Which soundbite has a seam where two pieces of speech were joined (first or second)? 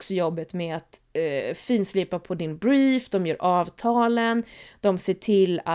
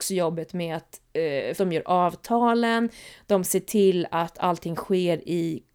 second